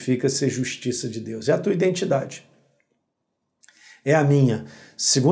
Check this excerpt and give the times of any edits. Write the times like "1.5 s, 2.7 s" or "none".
none